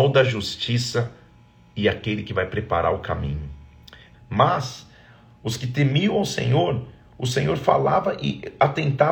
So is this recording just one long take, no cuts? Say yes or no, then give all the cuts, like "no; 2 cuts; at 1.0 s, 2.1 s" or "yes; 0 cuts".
no; 1 cut; at 4.1 s